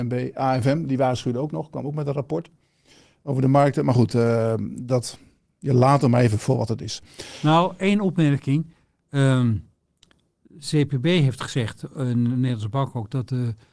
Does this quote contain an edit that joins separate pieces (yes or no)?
no